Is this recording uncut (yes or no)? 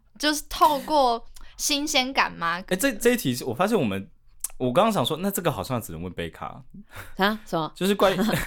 yes